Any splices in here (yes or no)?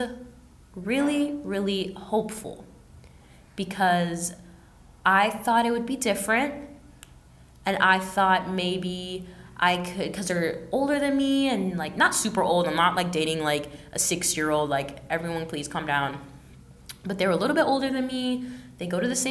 no